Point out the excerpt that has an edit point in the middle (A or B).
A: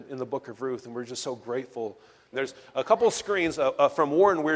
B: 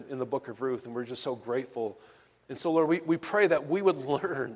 A